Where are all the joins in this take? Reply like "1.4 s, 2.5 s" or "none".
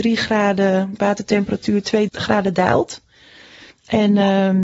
2.1 s